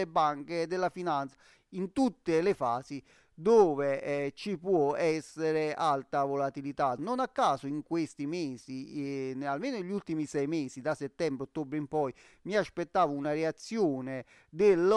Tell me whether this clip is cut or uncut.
uncut